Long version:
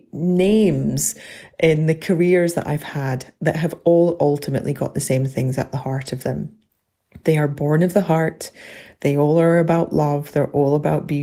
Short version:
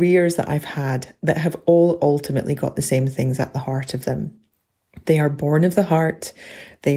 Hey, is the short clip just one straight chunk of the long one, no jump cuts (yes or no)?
yes